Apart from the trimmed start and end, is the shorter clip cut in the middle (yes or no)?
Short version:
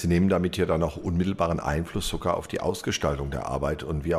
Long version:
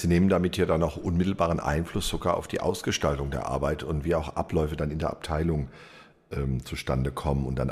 no